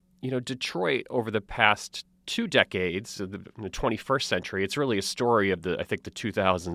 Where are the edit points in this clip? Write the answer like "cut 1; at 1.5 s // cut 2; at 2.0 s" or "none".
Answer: none